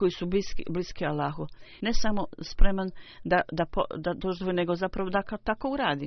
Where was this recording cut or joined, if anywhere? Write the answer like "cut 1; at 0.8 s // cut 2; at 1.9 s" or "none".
cut 1; at 1.8 s

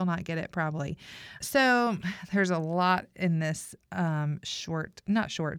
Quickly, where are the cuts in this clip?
cut 1; at 1.4 s

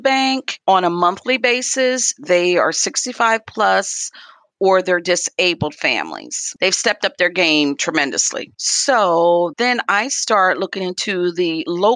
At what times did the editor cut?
cut 1; at 6.6 s // cut 2; at 8.6 s

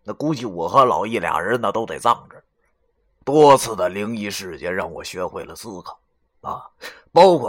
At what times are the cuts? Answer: none

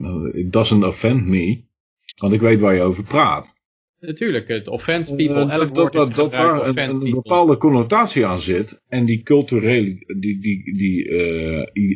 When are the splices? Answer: cut 1; at 3.9 s // cut 2; at 8.8 s

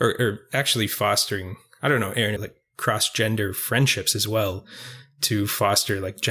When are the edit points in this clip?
cut 1; at 2.4 s

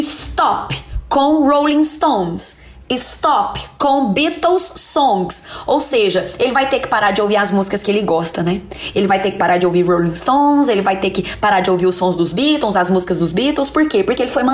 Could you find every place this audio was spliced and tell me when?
none

